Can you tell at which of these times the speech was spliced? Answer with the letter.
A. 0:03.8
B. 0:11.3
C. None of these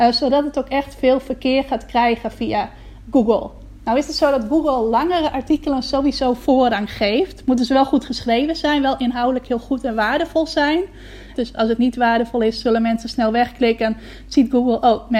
B